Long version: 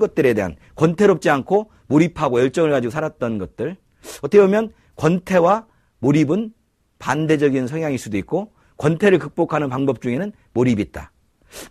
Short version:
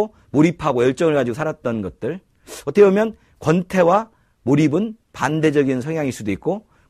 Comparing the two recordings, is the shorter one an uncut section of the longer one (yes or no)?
no